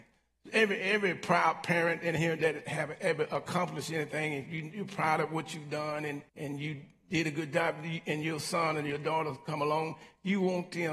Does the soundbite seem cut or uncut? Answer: cut